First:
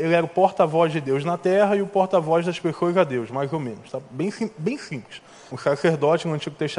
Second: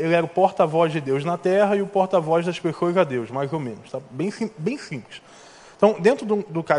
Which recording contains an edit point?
first; 1 cut; at 5.5 s

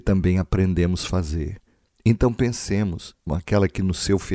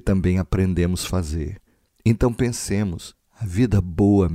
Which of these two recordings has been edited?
first; 1 cut; at 3.3 s

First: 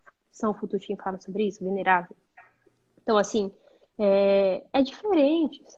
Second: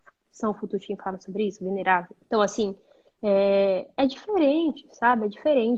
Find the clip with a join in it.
second; 1 cut; at 2.2 s

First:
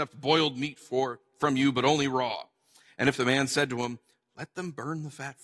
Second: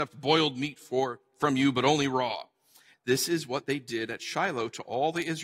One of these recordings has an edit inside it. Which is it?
second; 1 cut; at 2.9 s

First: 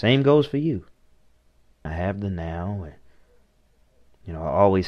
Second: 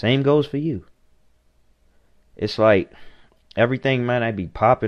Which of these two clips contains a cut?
first; 1 cut; at 1.9 s

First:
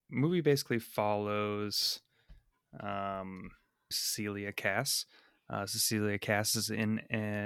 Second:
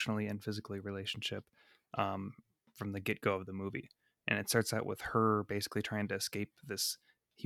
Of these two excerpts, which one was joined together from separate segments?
first; 1 cut; at 3.9 s

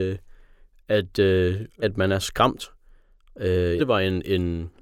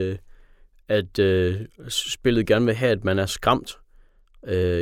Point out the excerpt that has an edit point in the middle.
first; 2 cuts; at 1.8 s, 3.8 s

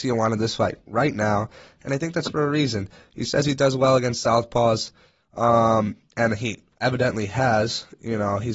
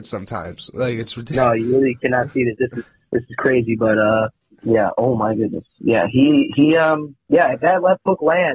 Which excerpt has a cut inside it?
second; 1 cut; at 2.6 s

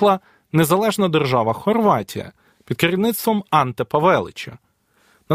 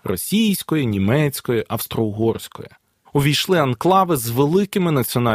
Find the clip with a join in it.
second; 1 cut; at 3.1 s

